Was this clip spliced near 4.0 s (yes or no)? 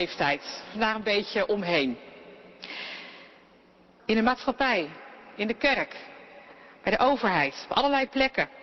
yes